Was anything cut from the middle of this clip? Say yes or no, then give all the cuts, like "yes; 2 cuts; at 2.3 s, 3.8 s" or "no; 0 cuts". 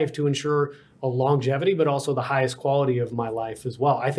no; 0 cuts